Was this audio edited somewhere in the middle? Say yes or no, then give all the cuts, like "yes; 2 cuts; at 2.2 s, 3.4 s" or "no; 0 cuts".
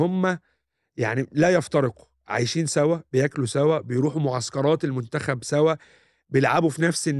no; 0 cuts